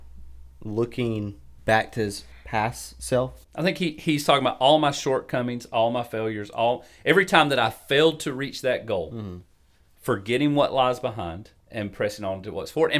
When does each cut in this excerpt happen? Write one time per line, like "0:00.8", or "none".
0:03.4